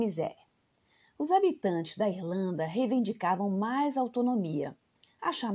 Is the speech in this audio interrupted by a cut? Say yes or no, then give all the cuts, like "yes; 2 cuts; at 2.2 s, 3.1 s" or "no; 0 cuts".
no; 0 cuts